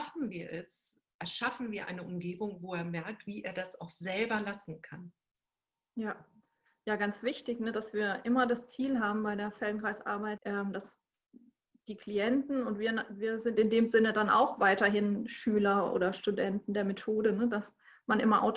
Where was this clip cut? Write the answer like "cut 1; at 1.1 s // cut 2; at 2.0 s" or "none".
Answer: cut 1; at 10.4 s